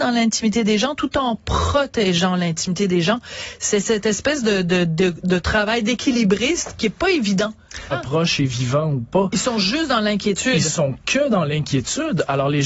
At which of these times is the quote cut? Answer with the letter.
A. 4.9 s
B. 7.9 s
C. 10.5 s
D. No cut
B